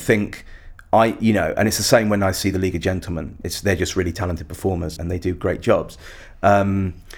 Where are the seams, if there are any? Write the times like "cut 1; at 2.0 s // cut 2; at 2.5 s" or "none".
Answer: cut 1; at 3.4 s // cut 2; at 5.0 s